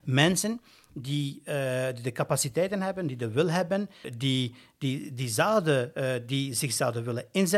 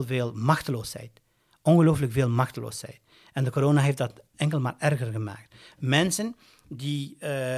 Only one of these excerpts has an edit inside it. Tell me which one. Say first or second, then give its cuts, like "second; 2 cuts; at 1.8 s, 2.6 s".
first; 1 cut; at 4.0 s